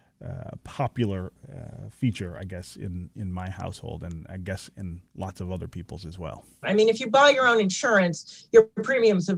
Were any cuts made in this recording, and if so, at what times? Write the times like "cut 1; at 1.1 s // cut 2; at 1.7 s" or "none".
cut 1; at 6.6 s